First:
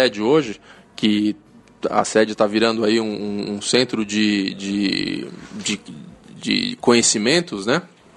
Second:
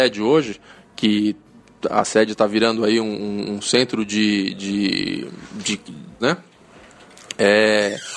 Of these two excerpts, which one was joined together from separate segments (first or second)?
second